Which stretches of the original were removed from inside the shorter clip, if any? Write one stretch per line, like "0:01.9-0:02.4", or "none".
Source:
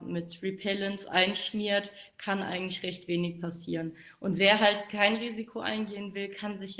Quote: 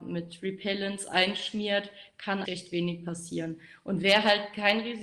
0:02.4-0:02.8